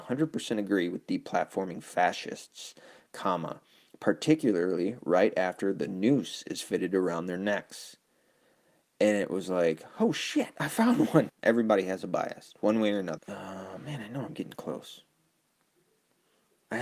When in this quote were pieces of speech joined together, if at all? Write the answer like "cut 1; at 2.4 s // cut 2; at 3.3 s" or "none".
cut 1; at 11.3 s // cut 2; at 13.2 s